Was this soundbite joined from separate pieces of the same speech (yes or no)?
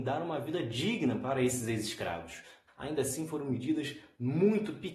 yes